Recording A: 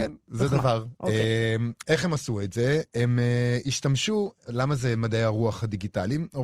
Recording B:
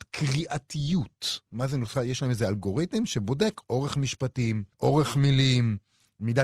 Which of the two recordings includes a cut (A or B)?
B